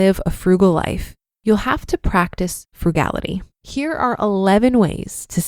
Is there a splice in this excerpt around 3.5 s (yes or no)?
yes